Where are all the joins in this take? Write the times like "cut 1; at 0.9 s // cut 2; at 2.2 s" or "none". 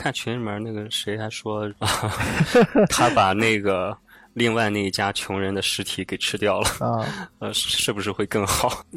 cut 1; at 1.7 s

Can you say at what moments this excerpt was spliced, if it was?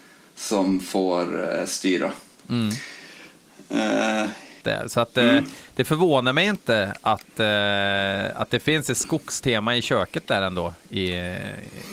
cut 1; at 2.4 s // cut 2; at 4.6 s

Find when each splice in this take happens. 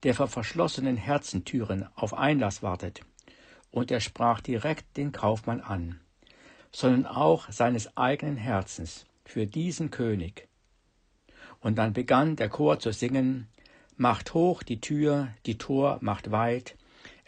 cut 1; at 6.6 s

